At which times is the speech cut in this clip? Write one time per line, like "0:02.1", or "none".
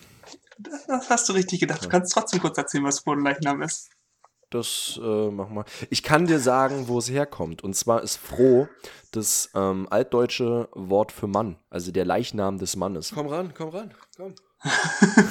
0:11.6
0:13.1